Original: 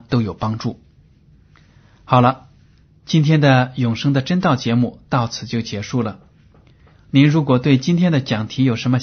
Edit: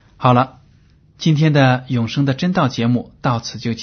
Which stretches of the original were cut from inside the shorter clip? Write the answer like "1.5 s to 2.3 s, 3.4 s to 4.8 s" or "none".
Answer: none